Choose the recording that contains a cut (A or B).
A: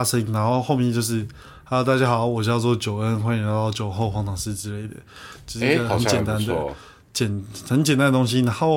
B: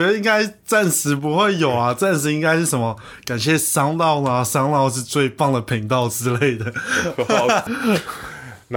B